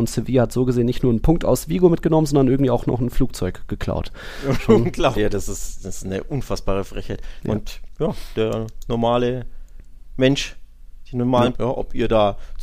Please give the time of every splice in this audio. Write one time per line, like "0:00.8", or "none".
0:05.1
0:07.4
0:11.5